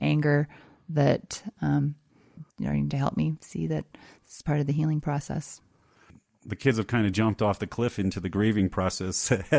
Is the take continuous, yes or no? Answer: yes